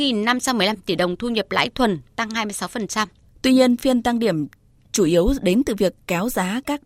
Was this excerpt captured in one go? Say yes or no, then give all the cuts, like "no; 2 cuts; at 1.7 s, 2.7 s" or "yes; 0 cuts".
no; 1 cut; at 3.3 s